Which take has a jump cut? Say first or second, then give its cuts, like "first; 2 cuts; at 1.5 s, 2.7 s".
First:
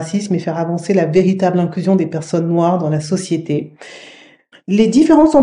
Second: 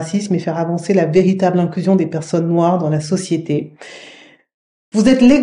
first; 1 cut; at 4.5 s